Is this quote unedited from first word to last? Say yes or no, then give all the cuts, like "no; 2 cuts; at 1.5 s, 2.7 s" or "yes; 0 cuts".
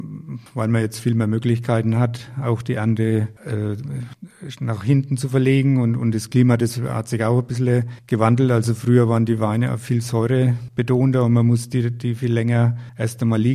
yes; 0 cuts